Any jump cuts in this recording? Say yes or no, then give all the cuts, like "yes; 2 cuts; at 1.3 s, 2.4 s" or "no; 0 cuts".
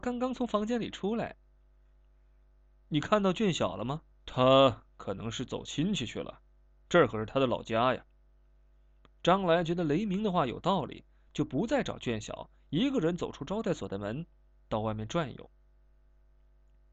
yes; 1 cut; at 4.1 s